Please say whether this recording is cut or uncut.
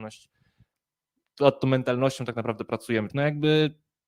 cut